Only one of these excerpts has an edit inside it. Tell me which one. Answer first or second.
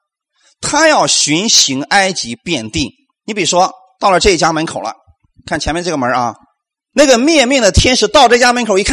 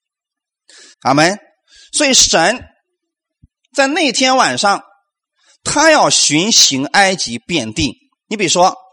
second